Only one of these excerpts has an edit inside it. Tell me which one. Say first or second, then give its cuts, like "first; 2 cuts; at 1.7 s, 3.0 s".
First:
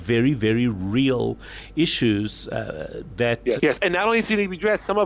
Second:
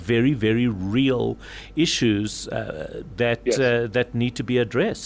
first; 1 cut; at 3.6 s